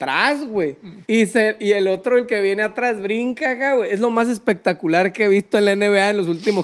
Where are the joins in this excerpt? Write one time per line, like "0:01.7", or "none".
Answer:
0:01.0